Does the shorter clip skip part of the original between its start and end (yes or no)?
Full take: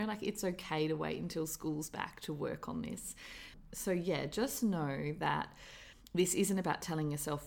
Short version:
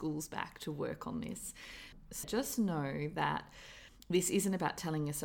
yes